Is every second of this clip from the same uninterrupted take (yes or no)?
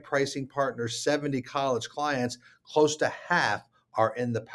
yes